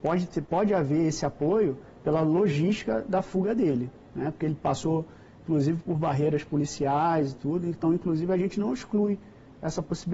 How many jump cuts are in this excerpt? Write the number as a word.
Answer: zero